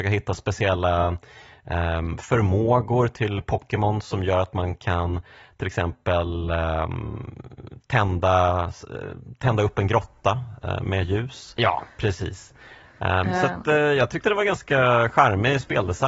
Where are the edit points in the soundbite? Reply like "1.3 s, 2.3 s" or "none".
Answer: 11.6 s